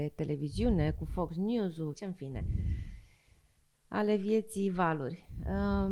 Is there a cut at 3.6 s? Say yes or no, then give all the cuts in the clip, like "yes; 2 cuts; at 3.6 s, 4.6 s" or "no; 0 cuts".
no; 1 cut; at 1.9 s